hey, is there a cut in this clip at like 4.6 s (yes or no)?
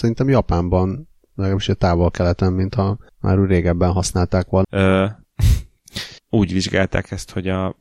yes